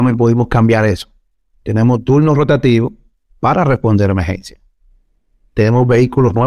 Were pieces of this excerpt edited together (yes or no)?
no